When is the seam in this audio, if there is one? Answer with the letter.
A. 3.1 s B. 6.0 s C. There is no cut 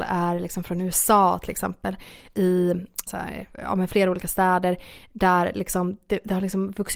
A